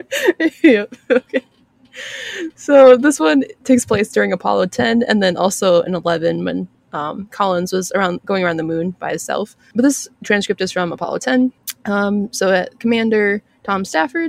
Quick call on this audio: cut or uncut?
uncut